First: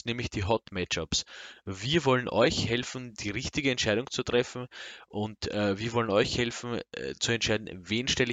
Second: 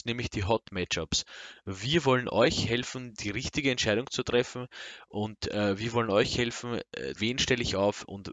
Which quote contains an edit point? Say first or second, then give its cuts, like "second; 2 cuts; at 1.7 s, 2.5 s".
second; 1 cut; at 7.2 s